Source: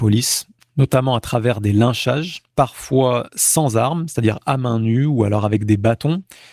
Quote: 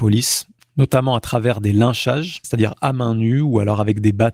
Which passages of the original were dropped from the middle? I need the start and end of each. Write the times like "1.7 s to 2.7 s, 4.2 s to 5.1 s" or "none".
2.4 s to 4.1 s